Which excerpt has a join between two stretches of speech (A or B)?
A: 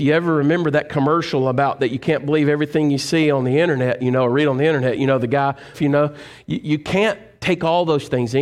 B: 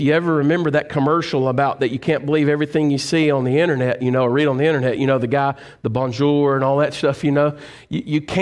A